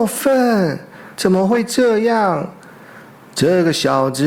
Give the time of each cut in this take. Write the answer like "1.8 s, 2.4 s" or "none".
1.2 s